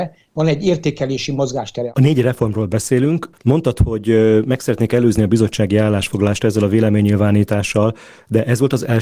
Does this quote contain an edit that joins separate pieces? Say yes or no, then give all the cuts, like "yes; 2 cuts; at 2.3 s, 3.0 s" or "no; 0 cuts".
yes; 1 cut; at 3.3 s